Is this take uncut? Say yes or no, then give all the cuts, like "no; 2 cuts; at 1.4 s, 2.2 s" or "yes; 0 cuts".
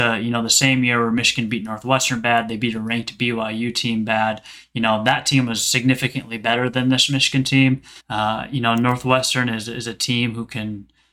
no; 1 cut; at 8.0 s